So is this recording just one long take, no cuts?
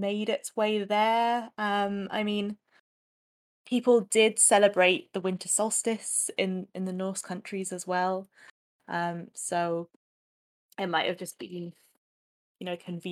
yes; 0 cuts

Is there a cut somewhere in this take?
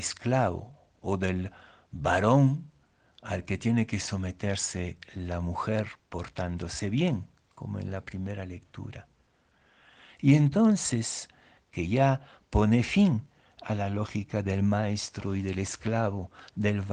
yes; 2 cuts; at 10.1 s, 11.6 s

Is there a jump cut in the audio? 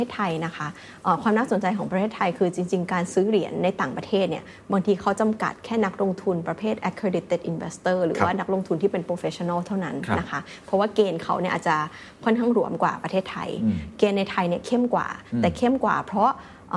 no; 0 cuts

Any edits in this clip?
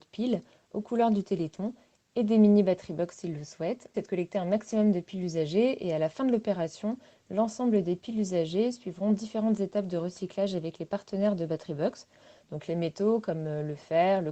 yes; 1 cut; at 3.9 s

